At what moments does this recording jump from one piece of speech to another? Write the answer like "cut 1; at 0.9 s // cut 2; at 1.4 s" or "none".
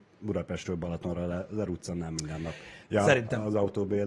cut 1; at 2.8 s